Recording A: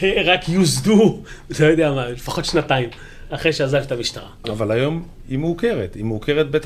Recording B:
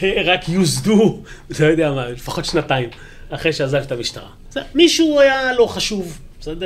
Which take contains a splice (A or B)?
A